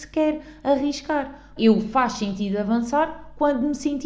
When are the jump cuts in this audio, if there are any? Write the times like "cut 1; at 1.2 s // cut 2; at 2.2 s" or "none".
cut 1; at 1.6 s

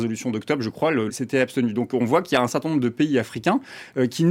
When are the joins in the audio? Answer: cut 1; at 1.1 s

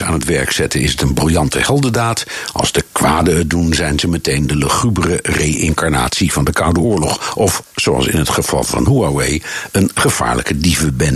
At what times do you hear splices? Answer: none

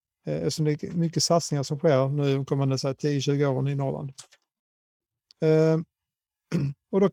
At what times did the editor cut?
none

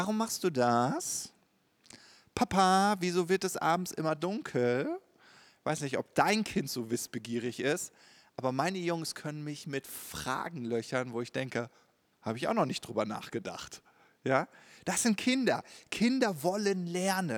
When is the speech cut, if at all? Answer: cut 1; at 12.1 s

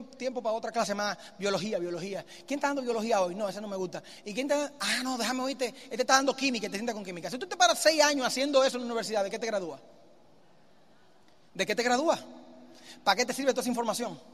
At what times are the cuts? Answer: none

